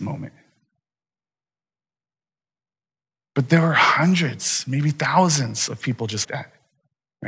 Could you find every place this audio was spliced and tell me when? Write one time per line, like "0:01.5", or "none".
0:03.2
0:06.2